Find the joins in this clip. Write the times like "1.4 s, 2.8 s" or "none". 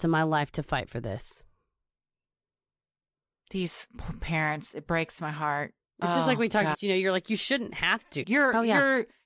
6.7 s, 8.2 s